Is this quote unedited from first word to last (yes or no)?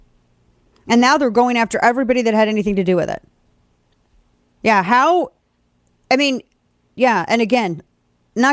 no